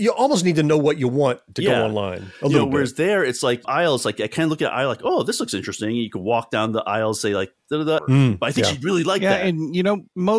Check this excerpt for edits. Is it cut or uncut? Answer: cut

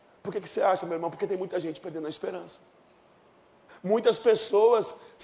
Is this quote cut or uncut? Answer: cut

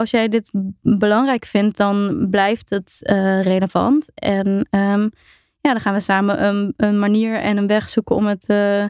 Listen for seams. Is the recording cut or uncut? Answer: uncut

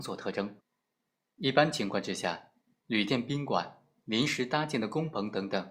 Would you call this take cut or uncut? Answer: cut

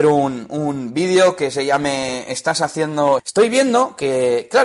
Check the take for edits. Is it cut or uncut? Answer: cut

